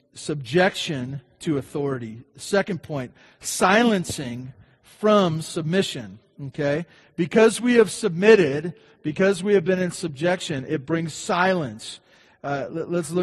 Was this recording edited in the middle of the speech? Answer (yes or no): no